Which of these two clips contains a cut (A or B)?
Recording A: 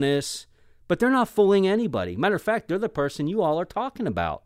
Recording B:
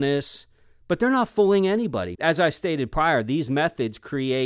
B